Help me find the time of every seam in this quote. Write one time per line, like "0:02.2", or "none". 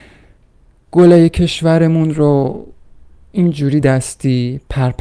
0:03.8